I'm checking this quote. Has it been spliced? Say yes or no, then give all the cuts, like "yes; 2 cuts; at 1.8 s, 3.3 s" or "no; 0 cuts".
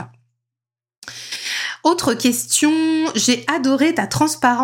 no; 0 cuts